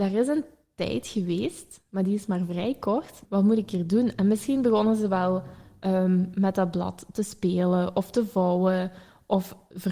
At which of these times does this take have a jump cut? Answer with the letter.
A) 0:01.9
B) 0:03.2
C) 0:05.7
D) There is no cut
B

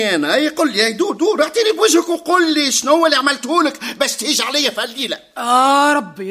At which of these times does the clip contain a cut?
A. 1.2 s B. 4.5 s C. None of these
A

